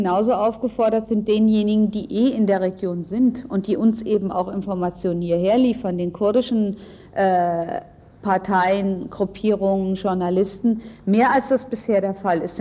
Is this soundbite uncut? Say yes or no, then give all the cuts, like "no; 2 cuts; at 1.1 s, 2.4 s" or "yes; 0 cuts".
yes; 0 cuts